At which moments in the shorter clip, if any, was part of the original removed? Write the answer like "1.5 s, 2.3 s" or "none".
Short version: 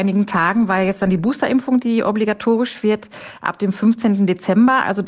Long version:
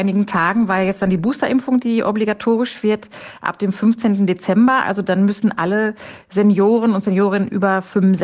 none

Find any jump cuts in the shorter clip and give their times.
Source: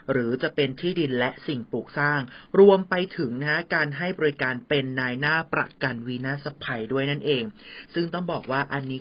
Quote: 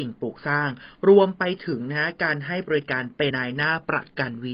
3.3 s

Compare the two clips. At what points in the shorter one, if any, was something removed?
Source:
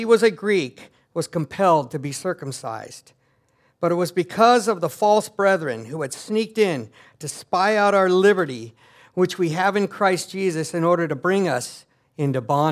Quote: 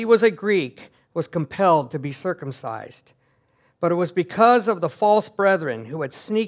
none

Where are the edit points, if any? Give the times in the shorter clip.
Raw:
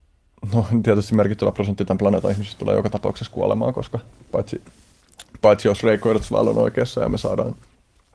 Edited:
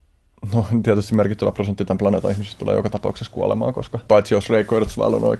4.1 s

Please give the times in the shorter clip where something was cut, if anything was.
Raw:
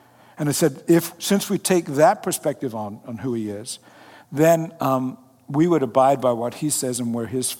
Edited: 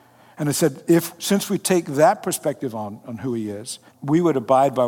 3.9 s

